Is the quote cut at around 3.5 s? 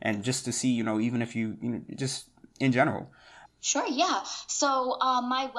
yes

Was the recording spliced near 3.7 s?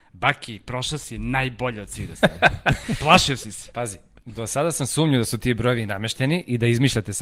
no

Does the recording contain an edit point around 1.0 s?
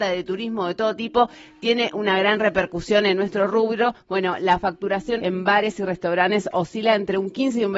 no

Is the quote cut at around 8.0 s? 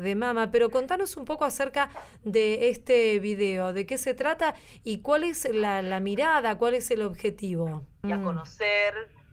yes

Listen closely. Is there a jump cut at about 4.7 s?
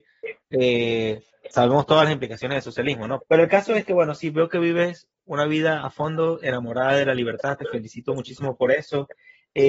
no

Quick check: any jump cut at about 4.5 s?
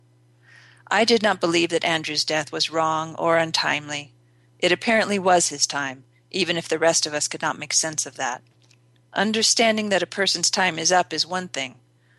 no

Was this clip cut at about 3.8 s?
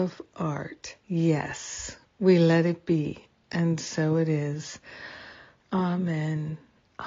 no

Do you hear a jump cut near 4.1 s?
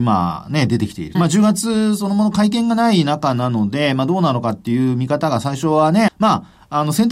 no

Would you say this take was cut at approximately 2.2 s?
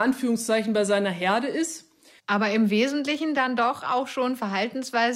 yes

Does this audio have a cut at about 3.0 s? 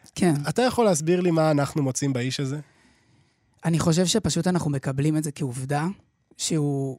no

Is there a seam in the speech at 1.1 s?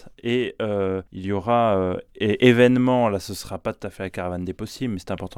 yes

